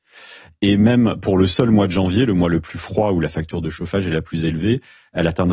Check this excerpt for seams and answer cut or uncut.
uncut